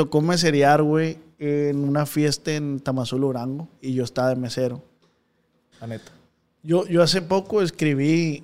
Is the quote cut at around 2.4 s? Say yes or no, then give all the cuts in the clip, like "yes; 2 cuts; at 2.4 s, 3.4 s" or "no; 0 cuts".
no; 2 cuts; at 3.7 s, 5.7 s